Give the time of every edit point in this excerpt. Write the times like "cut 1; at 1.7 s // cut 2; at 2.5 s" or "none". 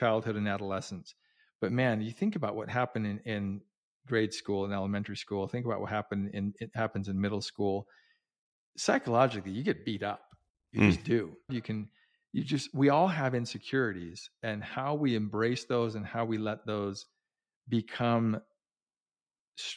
cut 1; at 11.5 s